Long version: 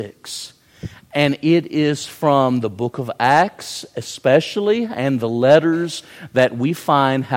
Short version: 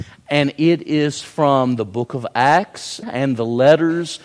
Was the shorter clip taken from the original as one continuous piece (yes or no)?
no